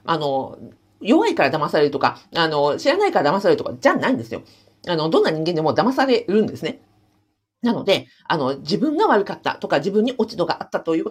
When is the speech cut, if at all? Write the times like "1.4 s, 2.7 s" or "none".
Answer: none

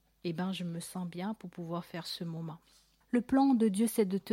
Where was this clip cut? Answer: 3.0 s

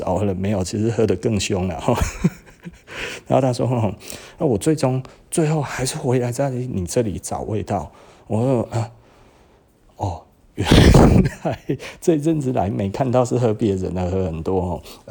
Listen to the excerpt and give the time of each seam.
none

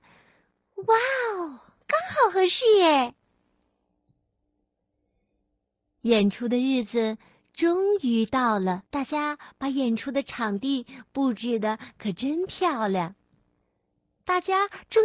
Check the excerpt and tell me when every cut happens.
1.8 s, 8.9 s

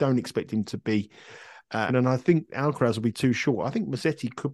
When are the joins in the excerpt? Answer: 1.9 s

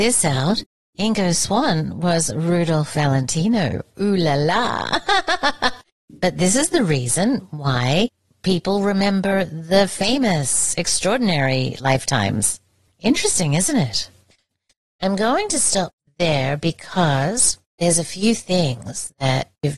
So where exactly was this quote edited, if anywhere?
none

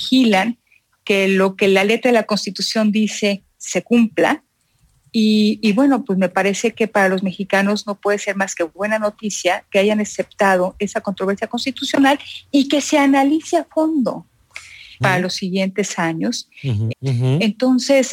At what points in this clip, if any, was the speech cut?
15.0 s, 16.9 s

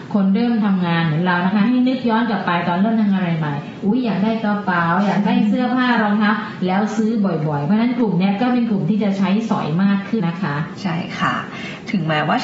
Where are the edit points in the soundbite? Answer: 10.2 s

